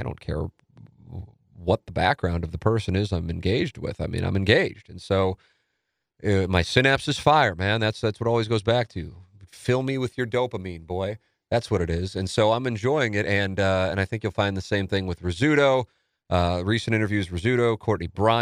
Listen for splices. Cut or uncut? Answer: uncut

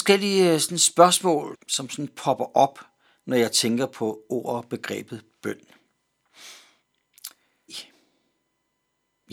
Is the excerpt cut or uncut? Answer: cut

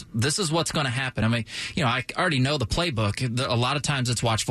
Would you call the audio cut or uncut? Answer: uncut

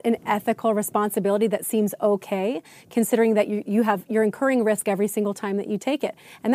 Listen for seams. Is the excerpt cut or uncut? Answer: uncut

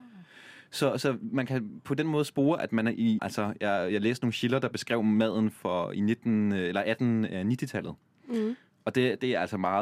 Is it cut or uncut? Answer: cut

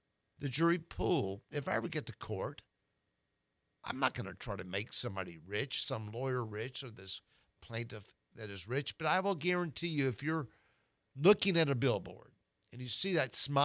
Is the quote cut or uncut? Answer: cut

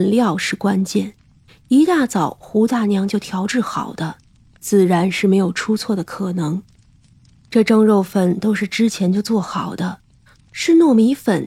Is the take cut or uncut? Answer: cut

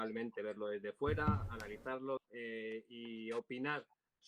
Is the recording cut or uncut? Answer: cut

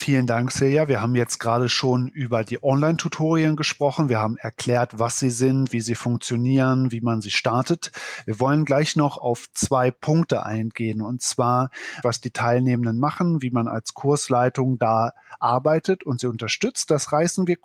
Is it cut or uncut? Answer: cut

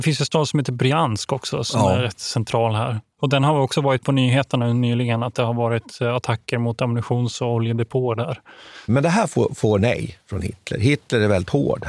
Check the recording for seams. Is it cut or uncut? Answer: cut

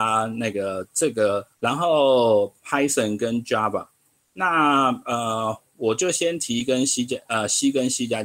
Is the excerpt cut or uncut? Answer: cut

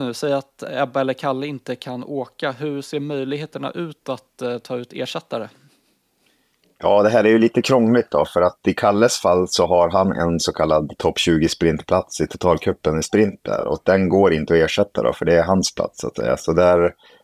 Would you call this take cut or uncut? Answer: uncut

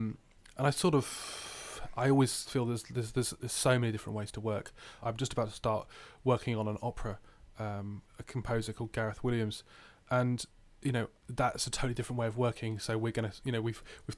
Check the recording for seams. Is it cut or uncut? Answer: cut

